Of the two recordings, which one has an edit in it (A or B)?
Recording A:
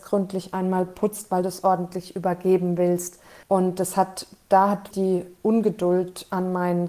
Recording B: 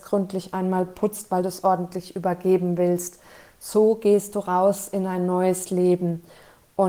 A